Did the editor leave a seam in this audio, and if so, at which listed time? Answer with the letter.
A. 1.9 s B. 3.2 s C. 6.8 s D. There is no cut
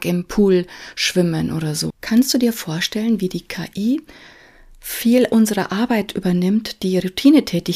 A